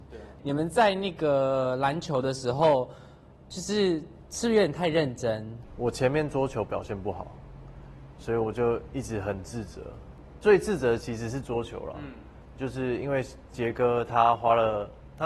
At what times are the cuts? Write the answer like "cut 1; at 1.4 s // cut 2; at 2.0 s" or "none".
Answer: cut 1; at 8.1 s